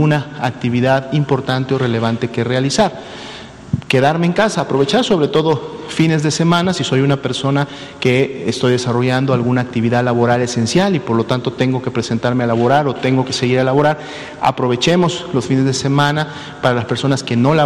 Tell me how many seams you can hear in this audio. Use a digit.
0